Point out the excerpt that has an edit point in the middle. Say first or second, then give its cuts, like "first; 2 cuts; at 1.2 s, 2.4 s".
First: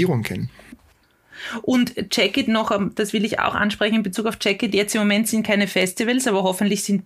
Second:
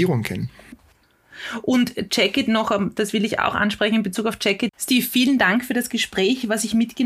second; 1 cut; at 4.7 s